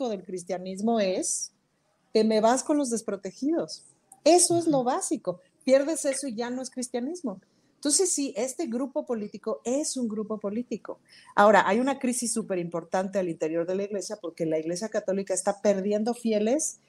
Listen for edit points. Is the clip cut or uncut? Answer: uncut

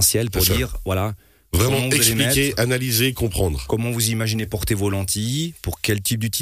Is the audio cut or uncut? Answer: uncut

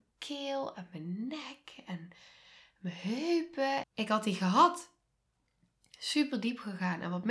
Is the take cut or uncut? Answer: cut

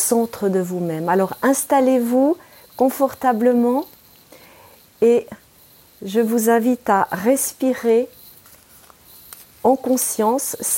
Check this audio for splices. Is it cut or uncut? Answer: uncut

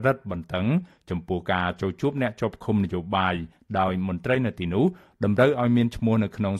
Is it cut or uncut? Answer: uncut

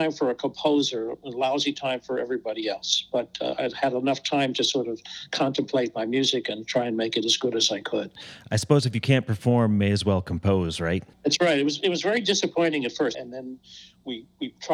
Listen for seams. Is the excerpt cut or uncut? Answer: cut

